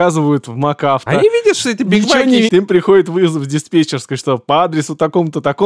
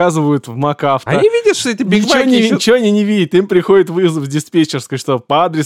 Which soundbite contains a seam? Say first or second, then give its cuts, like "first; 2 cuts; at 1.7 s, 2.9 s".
first; 1 cut; at 2.5 s